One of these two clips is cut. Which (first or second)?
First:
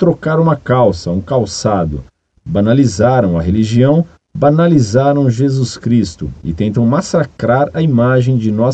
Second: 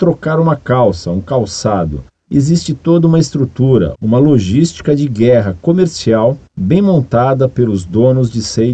second